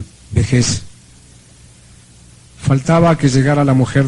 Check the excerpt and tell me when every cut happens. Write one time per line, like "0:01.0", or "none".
0:02.4